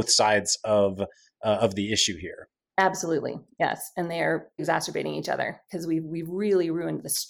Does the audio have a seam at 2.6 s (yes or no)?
no